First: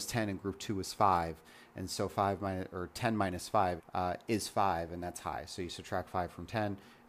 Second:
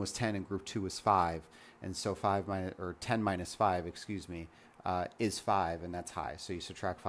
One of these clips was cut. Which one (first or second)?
first